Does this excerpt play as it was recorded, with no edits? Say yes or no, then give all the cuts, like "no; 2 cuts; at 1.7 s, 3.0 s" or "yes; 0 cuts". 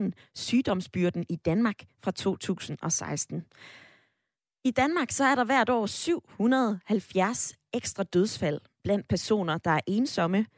yes; 0 cuts